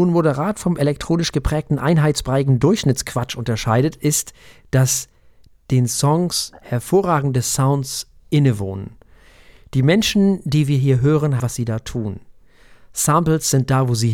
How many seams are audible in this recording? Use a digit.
1